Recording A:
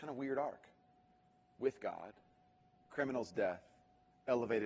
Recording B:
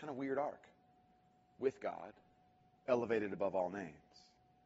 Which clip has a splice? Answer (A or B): B